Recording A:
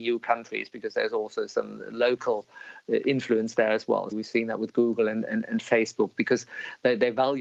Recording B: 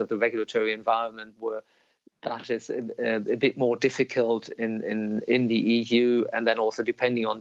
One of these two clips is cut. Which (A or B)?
A